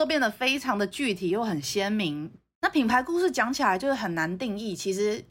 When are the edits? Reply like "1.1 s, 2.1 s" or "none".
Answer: 2.5 s